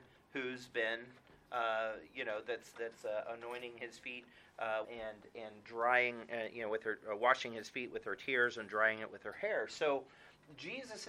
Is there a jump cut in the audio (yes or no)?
yes